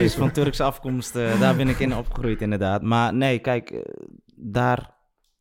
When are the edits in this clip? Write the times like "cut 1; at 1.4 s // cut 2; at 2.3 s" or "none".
none